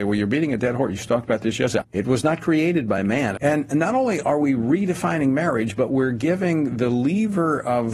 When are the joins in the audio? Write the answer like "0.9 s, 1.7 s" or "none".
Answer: 1.8 s, 3.4 s